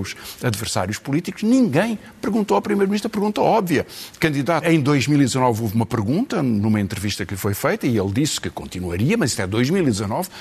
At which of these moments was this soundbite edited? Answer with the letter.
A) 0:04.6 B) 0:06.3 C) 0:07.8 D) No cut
A